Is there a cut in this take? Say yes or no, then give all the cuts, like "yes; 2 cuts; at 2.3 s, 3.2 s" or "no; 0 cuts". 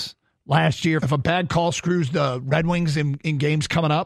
yes; 1 cut; at 1.0 s